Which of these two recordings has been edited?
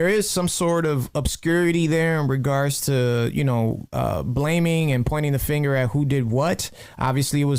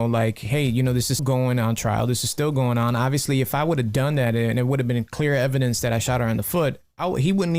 second; 1 cut; at 1.2 s

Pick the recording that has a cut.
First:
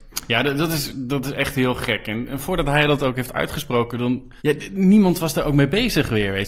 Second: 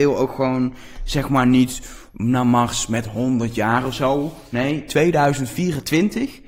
first; 1 cut; at 4.4 s

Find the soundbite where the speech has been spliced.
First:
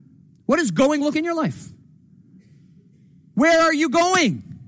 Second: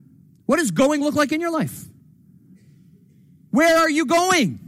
first; 1 cut; at 1.1 s

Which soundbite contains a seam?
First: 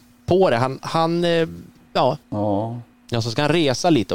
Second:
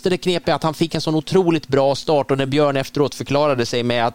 first; 1 cut; at 2.2 s

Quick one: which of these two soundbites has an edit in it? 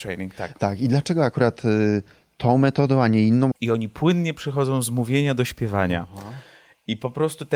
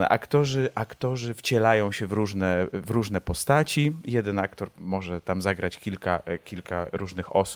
first; 1 cut; at 3.5 s

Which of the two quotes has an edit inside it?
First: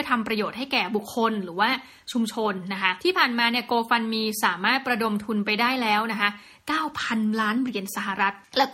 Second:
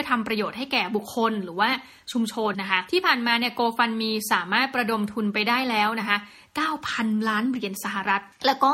second; 1 cut; at 2.5 s

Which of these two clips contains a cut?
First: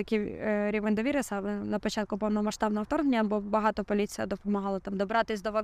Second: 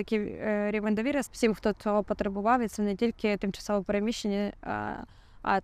second; 1 cut; at 1.3 s

